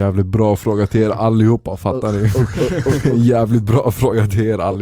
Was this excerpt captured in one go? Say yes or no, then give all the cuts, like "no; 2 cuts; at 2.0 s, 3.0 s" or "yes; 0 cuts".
yes; 0 cuts